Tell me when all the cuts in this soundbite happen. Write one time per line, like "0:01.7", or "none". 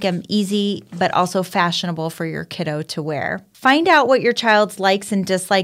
0:03.5